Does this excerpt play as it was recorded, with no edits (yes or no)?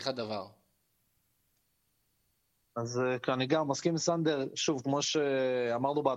yes